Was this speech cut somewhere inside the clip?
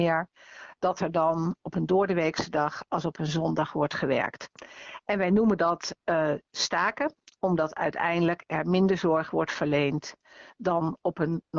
no; 0 cuts

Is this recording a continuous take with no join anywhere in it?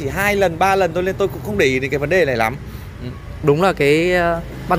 no; 1 cut; at 3.4 s

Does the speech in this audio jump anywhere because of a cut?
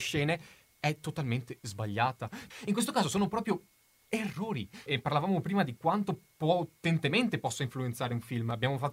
yes; 2 cuts; at 2.5 s, 4.9 s

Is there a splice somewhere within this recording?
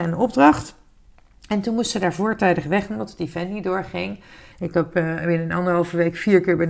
yes; 1 cut; at 4.5 s

